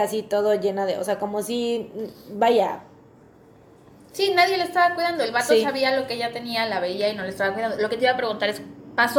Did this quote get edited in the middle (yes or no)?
no